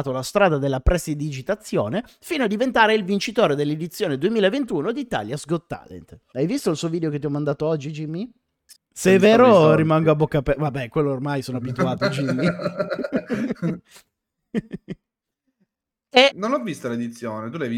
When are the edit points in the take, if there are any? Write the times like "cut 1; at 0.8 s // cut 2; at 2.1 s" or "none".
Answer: cut 1; at 8.8 s // cut 2; at 16.3 s